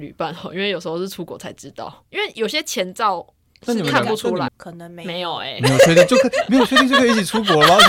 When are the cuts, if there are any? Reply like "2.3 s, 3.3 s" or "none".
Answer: 4.5 s